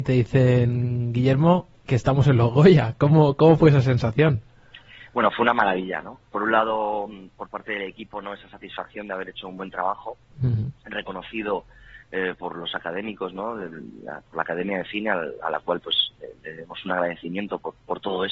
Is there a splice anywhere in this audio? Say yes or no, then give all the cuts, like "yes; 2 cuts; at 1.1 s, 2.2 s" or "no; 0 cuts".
no; 0 cuts